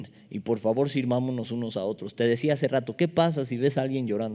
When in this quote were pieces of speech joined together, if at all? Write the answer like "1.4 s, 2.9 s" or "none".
none